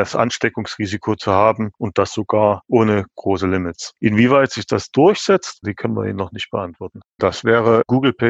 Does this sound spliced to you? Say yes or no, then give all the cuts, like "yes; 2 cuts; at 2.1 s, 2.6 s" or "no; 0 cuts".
yes; 2 cuts; at 5.6 s, 7.2 s